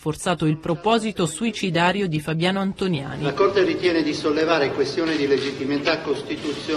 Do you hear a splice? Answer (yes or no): no